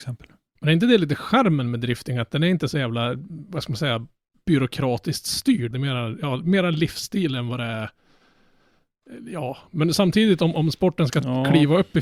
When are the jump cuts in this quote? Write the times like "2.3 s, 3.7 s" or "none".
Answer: 5.7 s

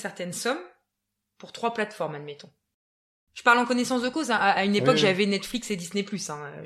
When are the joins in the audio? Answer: none

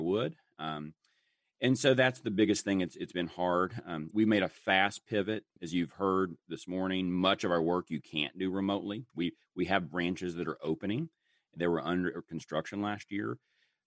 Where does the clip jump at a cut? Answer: 4.1 s, 5.6 s, 9.1 s

